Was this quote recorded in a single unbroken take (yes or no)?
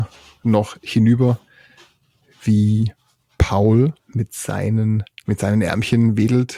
no